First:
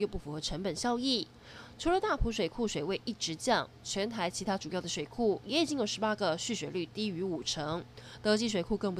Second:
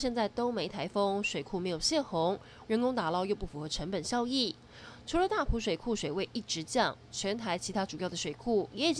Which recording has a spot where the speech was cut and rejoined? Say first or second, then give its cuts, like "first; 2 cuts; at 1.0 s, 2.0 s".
second; 1 cut; at 2.6 s